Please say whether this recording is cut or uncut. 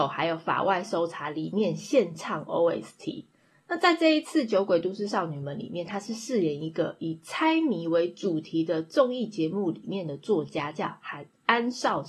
uncut